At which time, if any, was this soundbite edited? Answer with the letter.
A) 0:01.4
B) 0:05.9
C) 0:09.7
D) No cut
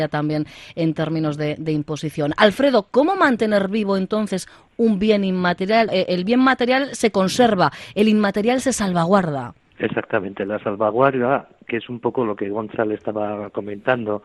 B